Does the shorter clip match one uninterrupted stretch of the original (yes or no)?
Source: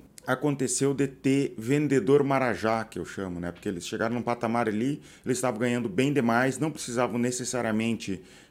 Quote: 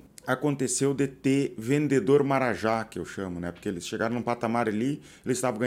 yes